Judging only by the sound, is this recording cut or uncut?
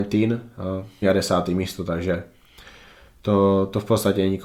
cut